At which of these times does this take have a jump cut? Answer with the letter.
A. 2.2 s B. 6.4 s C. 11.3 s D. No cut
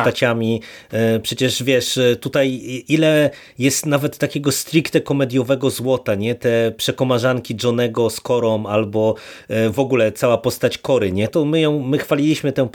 C